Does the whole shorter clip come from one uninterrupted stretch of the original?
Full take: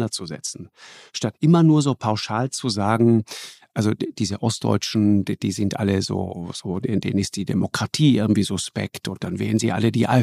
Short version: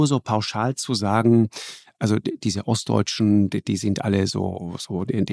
yes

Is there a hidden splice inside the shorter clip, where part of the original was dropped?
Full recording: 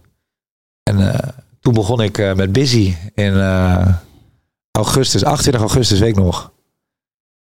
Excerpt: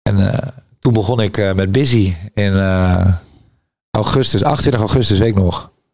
no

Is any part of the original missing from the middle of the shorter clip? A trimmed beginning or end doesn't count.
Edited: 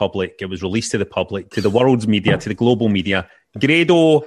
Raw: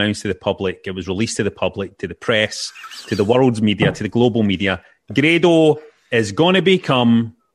yes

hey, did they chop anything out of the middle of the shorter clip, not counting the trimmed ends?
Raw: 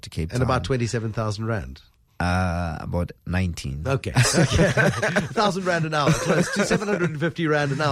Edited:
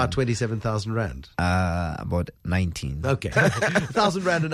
yes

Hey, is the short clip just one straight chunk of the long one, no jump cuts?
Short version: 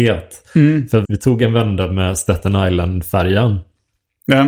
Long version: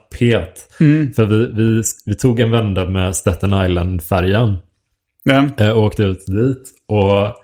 no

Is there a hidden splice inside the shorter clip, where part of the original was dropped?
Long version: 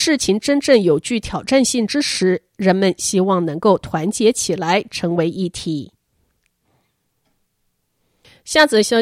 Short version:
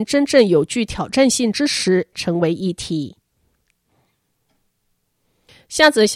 yes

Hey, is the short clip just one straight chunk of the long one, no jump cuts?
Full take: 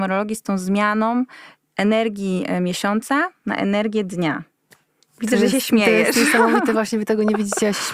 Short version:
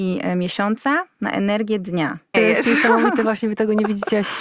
no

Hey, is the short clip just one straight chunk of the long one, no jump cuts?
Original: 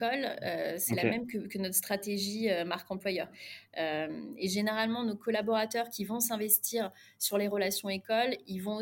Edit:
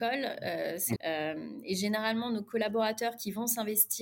no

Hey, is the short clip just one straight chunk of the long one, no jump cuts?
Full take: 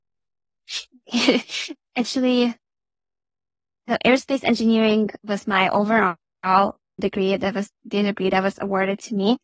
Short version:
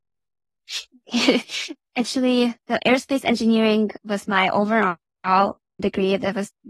no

